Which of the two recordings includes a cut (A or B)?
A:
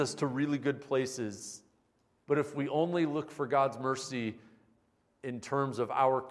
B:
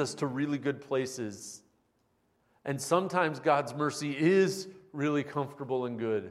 A